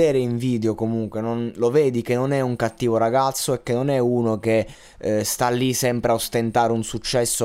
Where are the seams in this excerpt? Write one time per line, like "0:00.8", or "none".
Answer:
none